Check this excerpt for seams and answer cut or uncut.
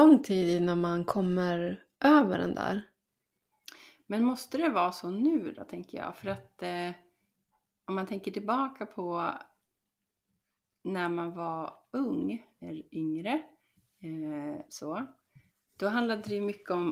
cut